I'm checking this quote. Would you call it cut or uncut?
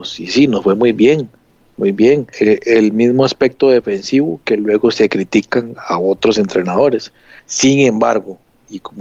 cut